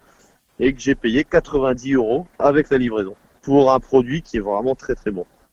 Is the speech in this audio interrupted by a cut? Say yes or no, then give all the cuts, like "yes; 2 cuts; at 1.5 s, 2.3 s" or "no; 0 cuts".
yes; 1 cut; at 3.3 s